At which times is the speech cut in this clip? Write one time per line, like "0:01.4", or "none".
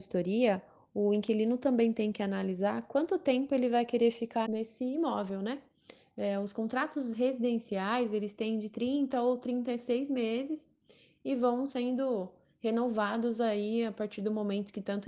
0:04.5